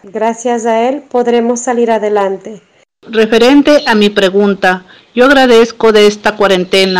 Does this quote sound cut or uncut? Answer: uncut